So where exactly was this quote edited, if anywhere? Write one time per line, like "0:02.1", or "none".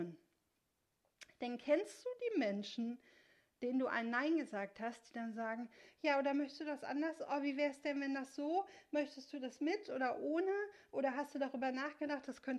none